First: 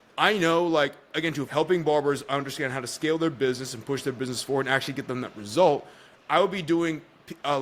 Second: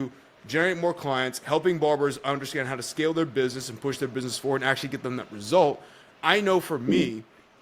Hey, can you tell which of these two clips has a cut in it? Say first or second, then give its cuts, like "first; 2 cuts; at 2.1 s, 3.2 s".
first; 2 cuts; at 1.4 s, 6.1 s